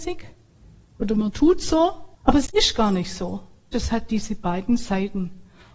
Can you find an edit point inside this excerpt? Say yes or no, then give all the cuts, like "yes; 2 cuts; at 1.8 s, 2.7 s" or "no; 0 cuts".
yes; 2 cuts; at 2.1 s, 3.7 s